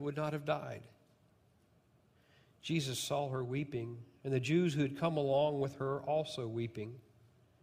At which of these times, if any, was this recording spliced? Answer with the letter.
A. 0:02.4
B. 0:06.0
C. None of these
C